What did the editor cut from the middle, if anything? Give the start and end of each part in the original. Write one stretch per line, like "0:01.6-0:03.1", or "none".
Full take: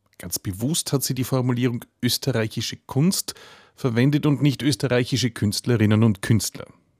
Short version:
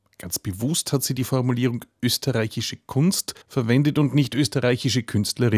0:03.4-0:03.7